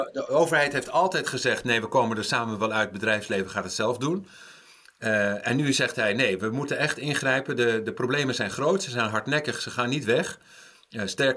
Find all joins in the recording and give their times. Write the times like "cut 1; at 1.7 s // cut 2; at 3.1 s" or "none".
none